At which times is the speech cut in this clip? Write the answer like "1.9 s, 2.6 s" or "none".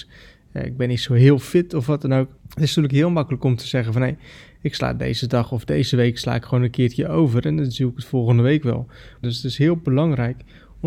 2.4 s, 9.2 s